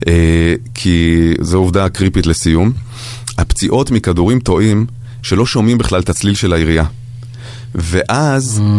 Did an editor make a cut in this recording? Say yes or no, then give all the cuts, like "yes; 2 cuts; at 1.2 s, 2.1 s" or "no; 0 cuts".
yes; 1 cut; at 5.2 s